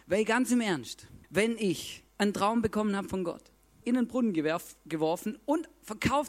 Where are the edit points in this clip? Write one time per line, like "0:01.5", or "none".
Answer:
0:01.2
0:03.8